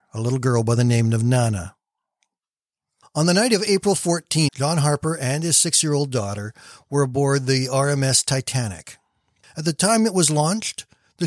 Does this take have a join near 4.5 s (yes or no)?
yes